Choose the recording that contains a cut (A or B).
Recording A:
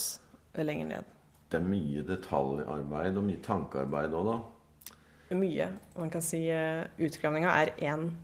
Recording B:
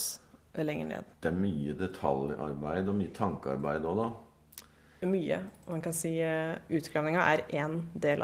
B